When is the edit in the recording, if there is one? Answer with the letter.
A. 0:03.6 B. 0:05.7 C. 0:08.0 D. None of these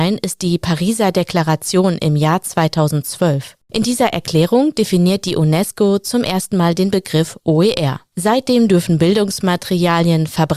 D